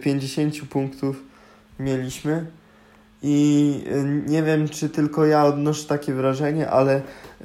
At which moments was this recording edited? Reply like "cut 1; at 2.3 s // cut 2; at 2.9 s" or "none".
none